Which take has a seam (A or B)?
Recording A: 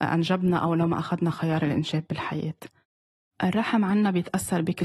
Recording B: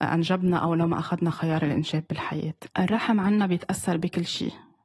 B